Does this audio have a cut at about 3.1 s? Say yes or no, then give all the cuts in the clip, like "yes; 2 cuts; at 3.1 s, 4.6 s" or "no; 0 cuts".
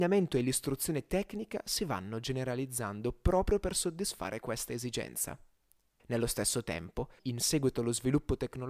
no; 2 cuts; at 6.0 s, 7.2 s